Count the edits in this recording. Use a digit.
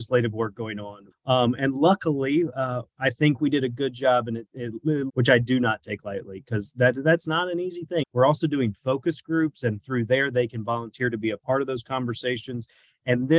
3